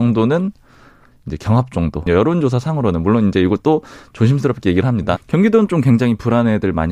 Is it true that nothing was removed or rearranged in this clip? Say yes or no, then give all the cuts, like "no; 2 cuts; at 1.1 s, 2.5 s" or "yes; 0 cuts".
no; 2 cuts; at 2.1 s, 5.2 s